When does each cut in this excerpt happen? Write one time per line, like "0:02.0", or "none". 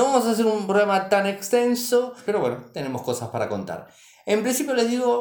0:02.3